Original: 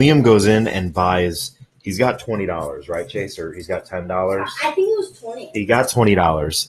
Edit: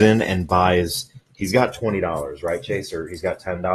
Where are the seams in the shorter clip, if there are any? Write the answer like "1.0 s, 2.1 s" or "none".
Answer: none